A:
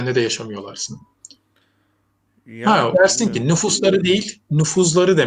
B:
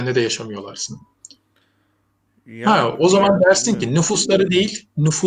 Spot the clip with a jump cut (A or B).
A